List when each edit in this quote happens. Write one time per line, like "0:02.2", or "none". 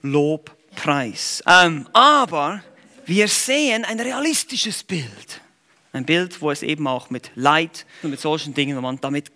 0:01.4
0:08.0